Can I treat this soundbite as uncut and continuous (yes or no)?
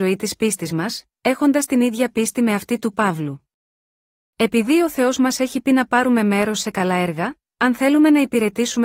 yes